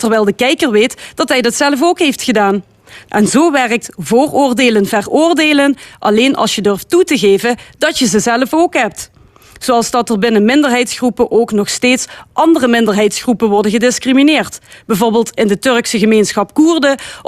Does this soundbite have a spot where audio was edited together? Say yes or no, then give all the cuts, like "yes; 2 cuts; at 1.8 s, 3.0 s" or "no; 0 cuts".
yes; 1 cut; at 3.1 s